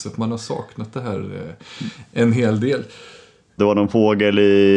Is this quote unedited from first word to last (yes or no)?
no